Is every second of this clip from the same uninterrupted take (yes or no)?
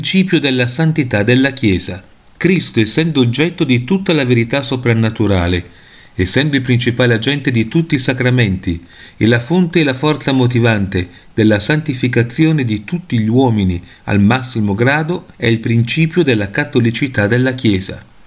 no